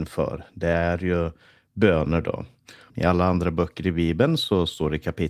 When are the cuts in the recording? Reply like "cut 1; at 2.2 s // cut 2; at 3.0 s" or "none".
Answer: cut 1; at 2.9 s